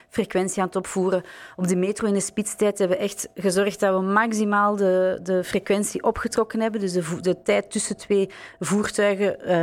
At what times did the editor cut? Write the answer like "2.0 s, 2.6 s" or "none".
none